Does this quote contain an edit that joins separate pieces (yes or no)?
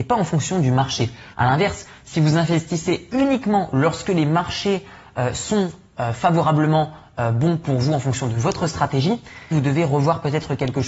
yes